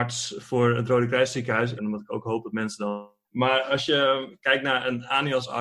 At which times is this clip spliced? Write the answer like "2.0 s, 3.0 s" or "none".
1.8 s, 3.2 s